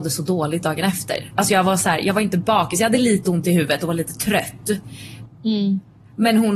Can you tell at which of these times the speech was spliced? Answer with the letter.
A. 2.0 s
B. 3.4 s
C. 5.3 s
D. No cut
C